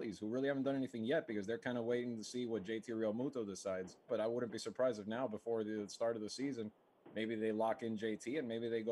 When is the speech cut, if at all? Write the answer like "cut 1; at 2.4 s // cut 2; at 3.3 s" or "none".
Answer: cut 1; at 4.1 s